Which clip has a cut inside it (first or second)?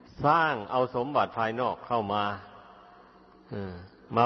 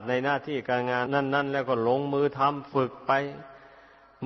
second